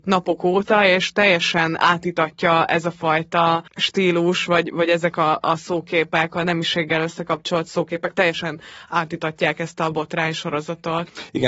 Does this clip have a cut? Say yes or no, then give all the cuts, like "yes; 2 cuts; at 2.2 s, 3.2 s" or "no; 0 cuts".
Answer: no; 0 cuts